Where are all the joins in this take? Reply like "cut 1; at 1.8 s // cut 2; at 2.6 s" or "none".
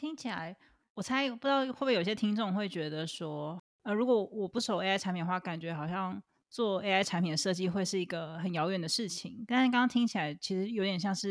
none